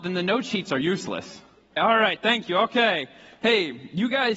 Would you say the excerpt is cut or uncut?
cut